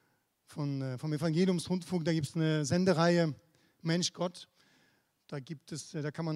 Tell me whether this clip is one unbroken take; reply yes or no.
yes